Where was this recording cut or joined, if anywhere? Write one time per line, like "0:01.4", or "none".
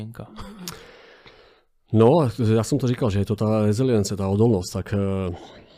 none

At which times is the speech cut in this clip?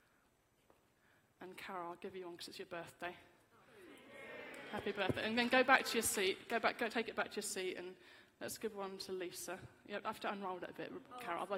0:06.9

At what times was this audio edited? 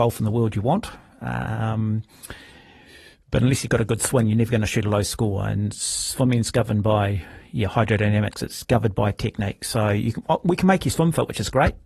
none

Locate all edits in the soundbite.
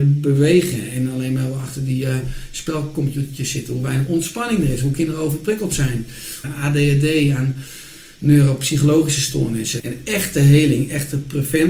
0:06.4
0:09.8

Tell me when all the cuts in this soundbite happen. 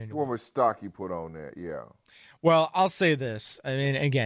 none

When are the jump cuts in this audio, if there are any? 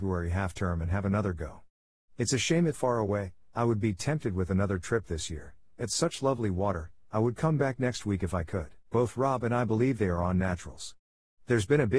0:02.7
0:08.8

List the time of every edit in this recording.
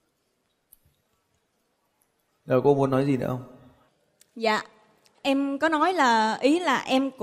none

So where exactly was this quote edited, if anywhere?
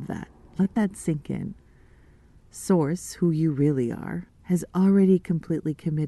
0:04.3

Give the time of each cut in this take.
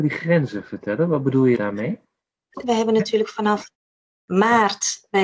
0:02.6

